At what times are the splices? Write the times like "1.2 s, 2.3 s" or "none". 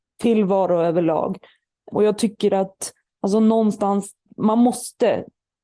1.9 s